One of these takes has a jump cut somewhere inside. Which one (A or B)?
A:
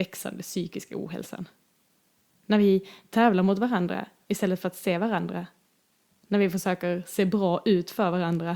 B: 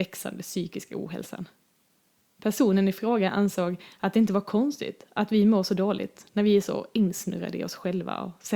A